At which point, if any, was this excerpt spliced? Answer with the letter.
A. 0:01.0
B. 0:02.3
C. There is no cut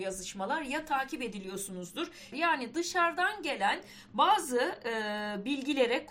B